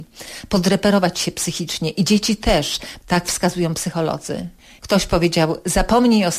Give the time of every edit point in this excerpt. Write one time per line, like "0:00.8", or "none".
0:03.0